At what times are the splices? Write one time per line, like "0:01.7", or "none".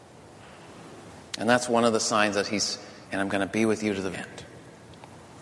0:03.0
0:04.1